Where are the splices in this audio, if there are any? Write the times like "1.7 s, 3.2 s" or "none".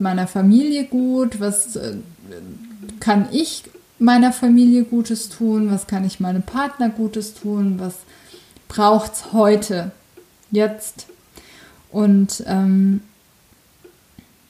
none